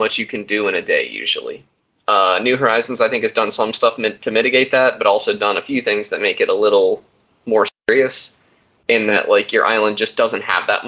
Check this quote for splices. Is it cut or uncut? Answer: uncut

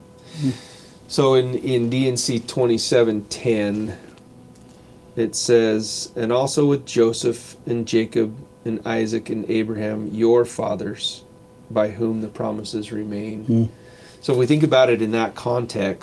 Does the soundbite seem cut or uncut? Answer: uncut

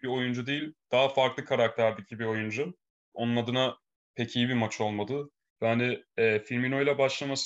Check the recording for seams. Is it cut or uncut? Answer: cut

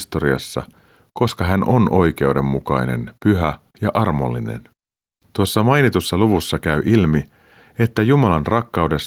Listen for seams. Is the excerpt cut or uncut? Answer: uncut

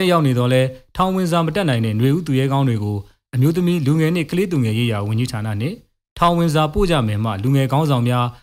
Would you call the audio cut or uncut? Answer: uncut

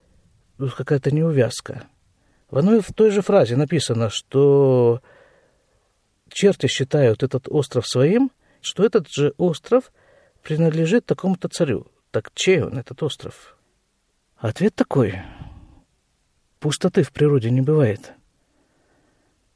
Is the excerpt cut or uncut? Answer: cut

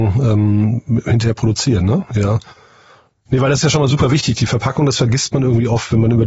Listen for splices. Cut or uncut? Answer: uncut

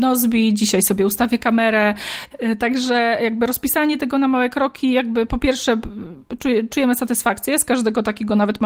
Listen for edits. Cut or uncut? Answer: uncut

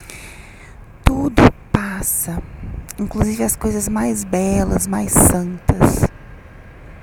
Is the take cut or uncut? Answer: uncut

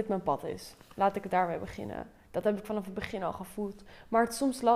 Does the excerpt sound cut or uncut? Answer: uncut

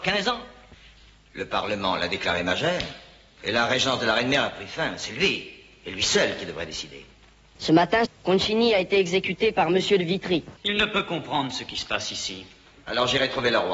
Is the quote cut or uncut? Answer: cut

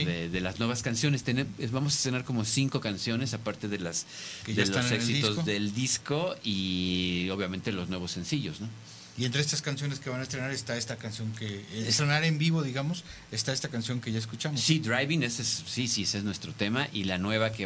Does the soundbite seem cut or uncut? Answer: uncut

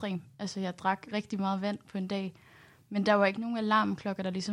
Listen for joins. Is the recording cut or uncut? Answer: uncut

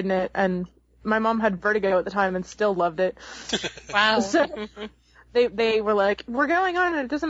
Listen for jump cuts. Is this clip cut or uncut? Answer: uncut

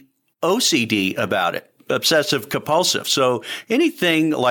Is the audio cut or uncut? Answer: uncut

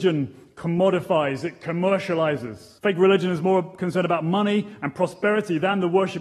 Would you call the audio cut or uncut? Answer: cut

